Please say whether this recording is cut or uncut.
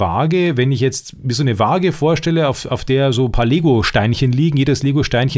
uncut